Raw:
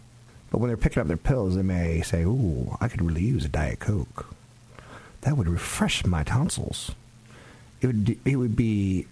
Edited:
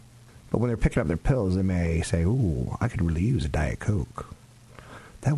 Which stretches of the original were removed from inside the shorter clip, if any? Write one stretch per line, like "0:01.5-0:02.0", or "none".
none